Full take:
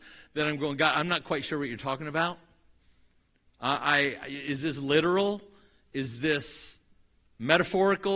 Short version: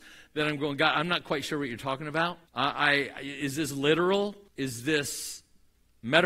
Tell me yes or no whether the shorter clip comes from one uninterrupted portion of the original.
no